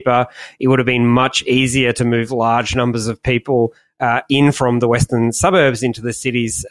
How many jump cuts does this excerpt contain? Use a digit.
0